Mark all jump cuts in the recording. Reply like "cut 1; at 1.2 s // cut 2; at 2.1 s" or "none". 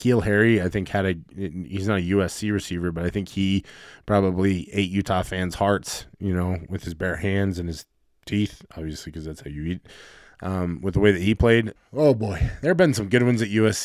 cut 1; at 11.8 s